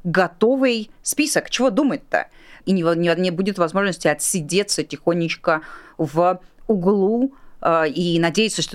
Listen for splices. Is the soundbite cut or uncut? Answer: cut